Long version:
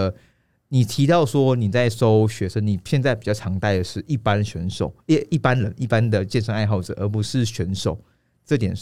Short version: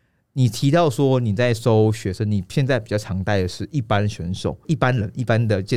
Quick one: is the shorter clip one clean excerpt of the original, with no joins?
no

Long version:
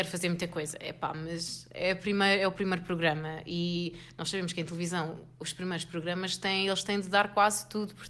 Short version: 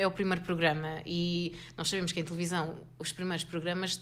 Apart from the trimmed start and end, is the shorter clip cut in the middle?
no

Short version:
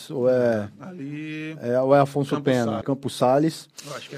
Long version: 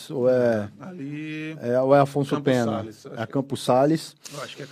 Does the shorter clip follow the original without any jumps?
no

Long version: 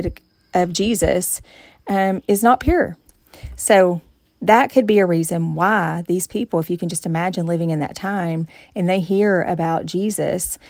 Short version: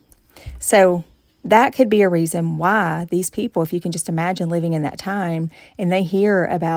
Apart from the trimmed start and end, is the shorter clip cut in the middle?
no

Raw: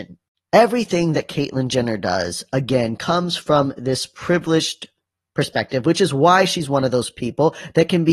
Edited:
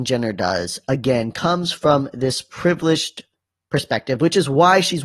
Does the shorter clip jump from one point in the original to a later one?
no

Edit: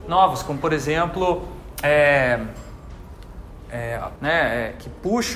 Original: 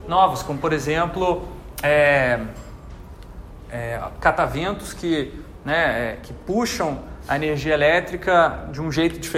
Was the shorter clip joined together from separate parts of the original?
yes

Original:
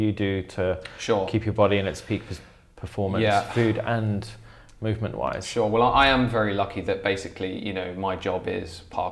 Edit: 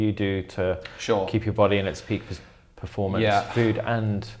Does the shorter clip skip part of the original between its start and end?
no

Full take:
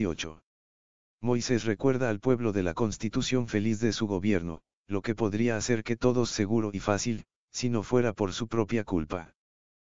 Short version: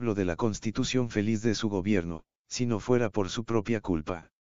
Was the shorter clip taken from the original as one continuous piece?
no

